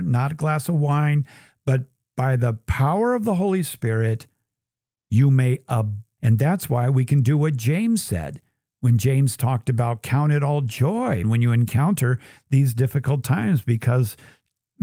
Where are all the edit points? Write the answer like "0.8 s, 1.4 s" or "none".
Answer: 6.2 s, 11.2 s